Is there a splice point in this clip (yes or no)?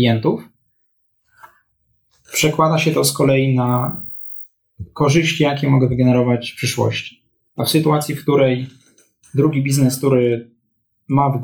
no